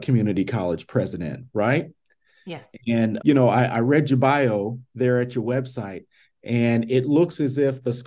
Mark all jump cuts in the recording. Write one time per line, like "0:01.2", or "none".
0:03.2

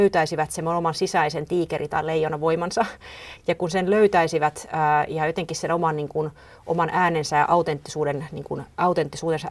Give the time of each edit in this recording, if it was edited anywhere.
none

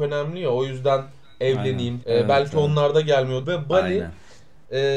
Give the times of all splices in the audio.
0:02.0
0:03.4

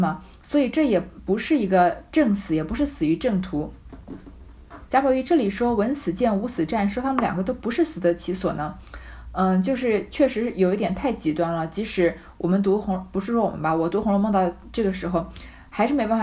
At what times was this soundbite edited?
0:04.9

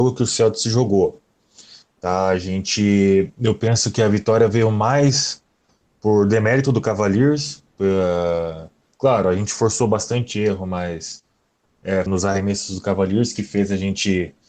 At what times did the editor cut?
0:12.1

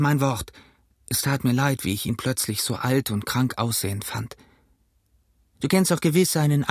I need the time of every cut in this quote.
0:05.4

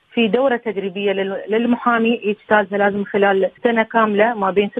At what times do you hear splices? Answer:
0:03.6

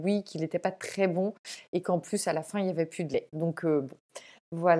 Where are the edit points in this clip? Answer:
none

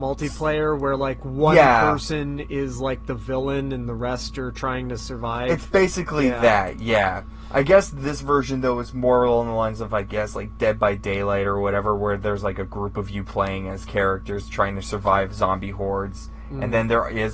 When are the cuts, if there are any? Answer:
none

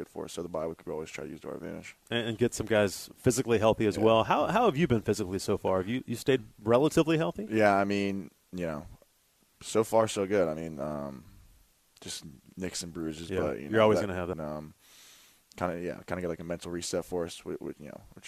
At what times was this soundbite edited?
0:14.3

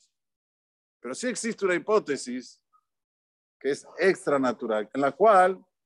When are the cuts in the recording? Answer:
0:04.9

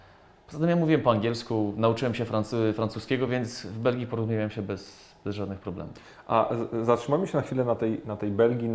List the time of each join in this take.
none

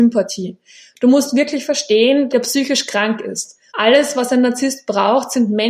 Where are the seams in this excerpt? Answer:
0:02.3
0:03.7

